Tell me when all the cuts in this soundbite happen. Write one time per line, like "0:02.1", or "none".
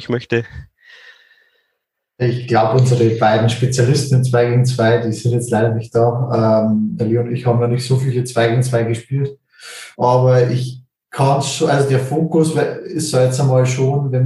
none